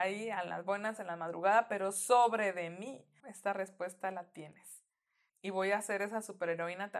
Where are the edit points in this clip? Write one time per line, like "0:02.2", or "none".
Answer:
0:01.0
0:03.2
0:05.3